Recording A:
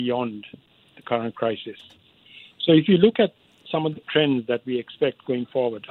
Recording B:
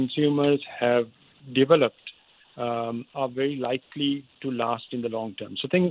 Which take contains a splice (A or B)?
B